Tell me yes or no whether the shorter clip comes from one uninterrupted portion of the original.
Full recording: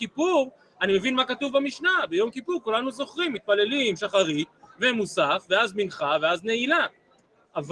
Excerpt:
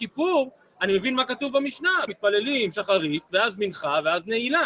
no